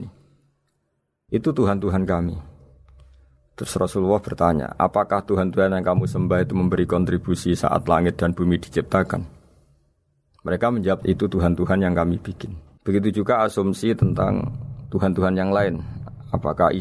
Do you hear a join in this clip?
yes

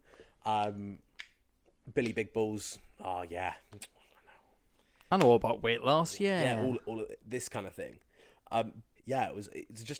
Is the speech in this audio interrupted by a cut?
yes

